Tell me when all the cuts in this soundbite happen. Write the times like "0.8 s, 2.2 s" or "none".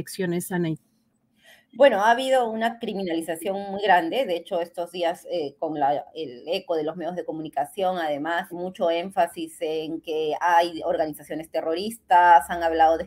8.5 s